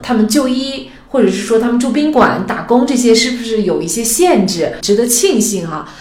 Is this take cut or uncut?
cut